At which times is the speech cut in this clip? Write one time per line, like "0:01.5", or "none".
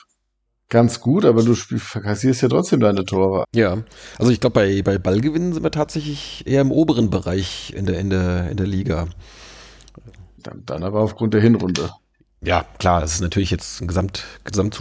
0:03.4